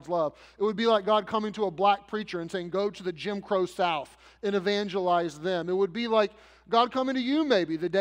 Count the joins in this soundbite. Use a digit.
0